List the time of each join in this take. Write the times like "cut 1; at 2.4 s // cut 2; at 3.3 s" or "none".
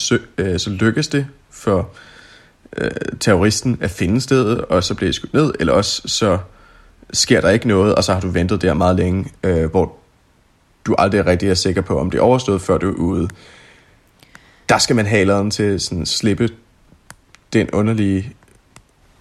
cut 1; at 9.7 s